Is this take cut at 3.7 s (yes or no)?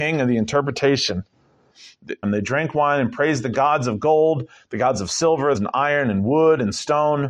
no